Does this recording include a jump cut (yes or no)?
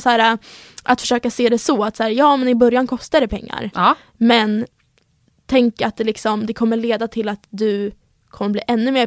no